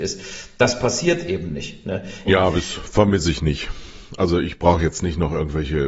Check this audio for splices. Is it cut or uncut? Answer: cut